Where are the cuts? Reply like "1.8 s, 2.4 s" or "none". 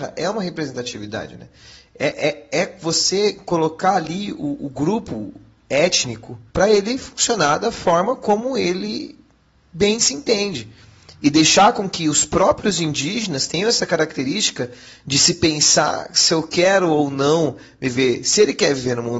6.5 s